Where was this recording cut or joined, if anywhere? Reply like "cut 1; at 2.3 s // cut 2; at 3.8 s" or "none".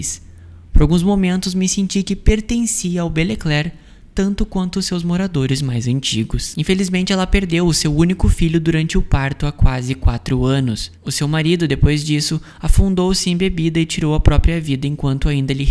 cut 1; at 6.5 s